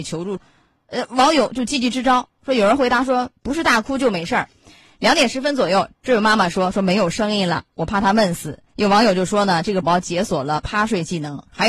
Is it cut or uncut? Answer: cut